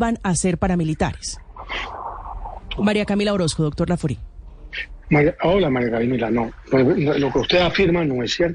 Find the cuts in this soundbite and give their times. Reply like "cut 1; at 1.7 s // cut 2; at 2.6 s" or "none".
cut 1; at 2.8 s